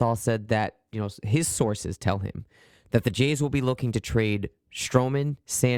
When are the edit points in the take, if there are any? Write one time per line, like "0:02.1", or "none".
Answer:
none